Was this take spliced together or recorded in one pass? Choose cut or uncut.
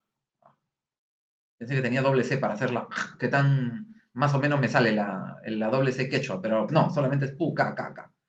cut